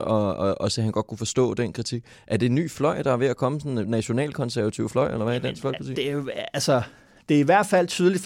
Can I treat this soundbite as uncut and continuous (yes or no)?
yes